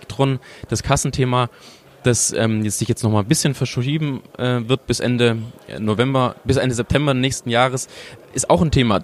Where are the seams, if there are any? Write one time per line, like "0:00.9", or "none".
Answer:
none